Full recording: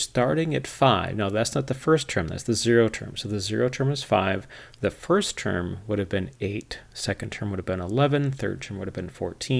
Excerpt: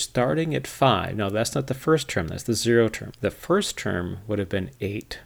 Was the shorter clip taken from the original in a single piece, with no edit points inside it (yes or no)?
no